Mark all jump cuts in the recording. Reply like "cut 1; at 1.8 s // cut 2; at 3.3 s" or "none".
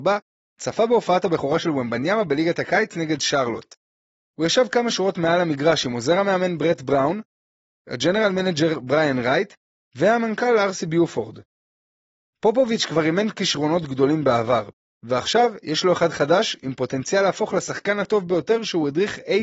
none